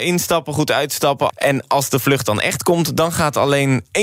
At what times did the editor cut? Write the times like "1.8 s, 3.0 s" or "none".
1.3 s